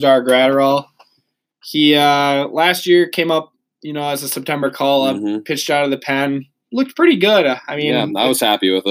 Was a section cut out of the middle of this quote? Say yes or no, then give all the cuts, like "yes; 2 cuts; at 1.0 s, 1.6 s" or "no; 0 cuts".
no; 0 cuts